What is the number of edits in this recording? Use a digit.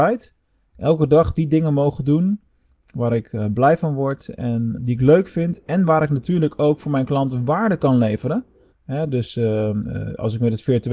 2